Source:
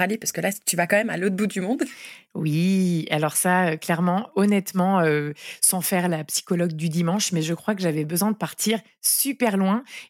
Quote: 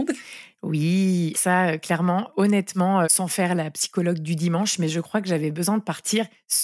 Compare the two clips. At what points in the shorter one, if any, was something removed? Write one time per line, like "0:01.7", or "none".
0:01.3
0:03.0